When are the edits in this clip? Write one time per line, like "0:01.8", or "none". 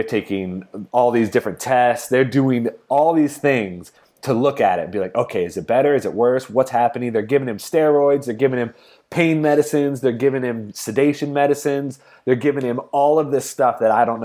none